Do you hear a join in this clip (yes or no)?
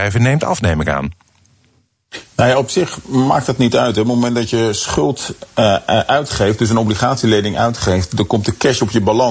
no